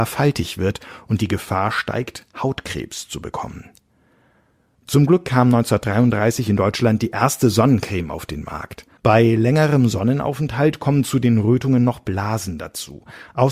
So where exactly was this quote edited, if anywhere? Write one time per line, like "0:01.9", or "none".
0:09.0